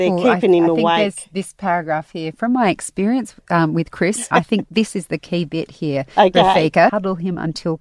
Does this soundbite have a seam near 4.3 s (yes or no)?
yes